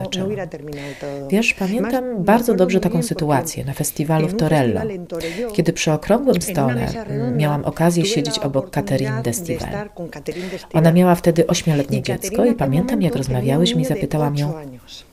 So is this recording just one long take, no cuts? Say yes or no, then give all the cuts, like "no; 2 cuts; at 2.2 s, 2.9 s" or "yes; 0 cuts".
yes; 0 cuts